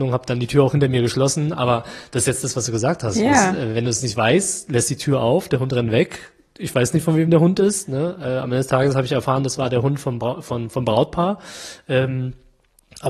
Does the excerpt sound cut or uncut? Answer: uncut